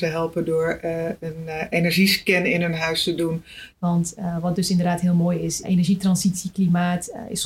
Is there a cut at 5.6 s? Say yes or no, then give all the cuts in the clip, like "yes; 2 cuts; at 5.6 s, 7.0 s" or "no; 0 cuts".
yes; 2 cuts; at 3.7 s, 5.6 s